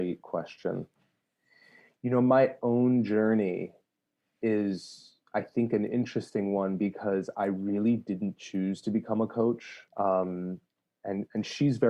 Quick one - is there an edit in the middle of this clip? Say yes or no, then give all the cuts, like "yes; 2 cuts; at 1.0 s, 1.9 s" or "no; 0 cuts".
yes; 1 cut; at 9.9 s